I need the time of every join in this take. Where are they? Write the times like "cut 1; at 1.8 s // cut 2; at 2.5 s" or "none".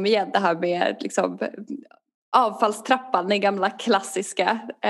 none